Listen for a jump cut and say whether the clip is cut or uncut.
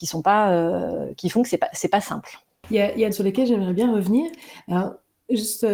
cut